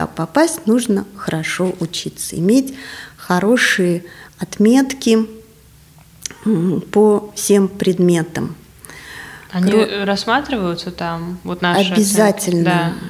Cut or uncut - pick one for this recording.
uncut